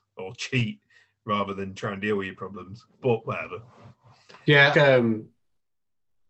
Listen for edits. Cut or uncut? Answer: cut